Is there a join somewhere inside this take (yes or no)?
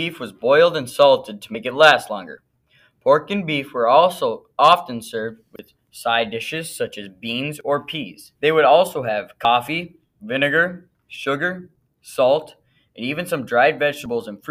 yes